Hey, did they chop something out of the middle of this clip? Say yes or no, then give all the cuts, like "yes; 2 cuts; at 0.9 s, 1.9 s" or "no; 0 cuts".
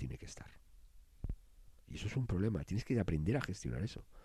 yes; 1 cut; at 1.8 s